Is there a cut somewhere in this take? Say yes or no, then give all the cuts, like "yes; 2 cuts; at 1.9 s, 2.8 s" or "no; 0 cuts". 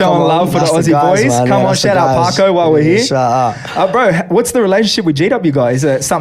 no; 0 cuts